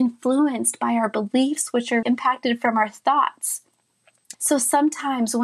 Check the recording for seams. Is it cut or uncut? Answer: cut